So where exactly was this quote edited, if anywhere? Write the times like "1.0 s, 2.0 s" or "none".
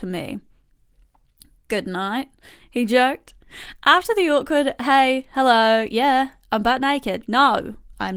none